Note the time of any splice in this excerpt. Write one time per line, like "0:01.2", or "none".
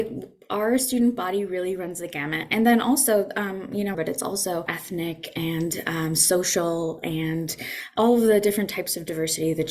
0:03.9